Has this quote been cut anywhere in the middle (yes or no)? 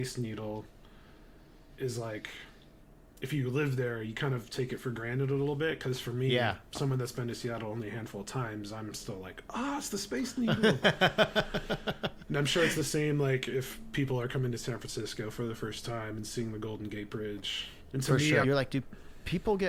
yes